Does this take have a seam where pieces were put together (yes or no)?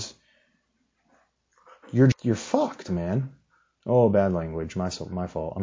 yes